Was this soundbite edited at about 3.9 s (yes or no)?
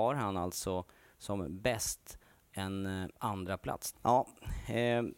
yes